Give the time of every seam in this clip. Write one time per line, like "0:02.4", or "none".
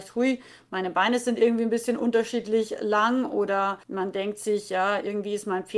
0:03.8